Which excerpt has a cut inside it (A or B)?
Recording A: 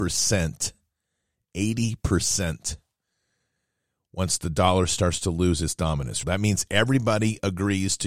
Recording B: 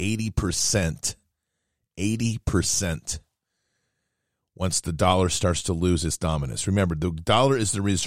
A